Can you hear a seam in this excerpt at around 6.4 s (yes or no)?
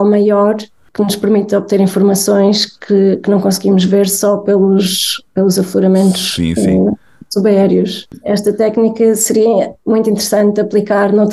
no